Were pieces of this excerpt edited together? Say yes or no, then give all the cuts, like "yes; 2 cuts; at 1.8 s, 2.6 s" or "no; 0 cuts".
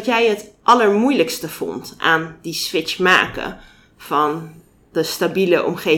no; 0 cuts